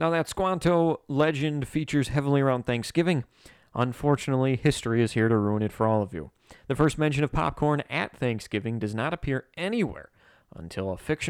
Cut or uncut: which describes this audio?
uncut